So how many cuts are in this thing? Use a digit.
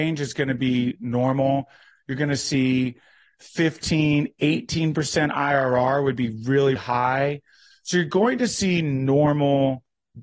1